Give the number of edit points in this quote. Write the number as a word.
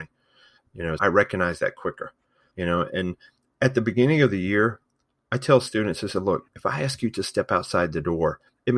two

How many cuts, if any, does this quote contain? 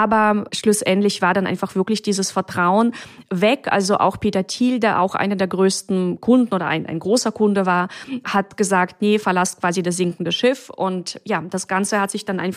zero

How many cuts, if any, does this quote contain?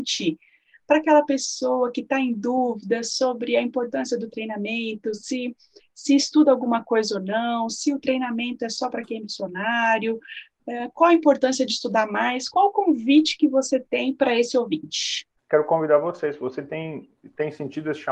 zero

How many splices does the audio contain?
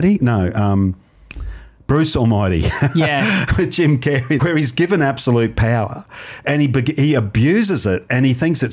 one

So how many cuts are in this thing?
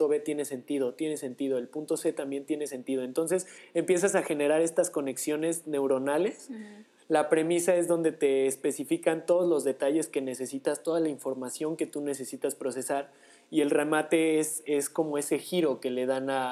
one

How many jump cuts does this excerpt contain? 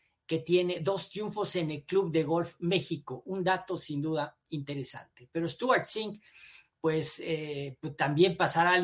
zero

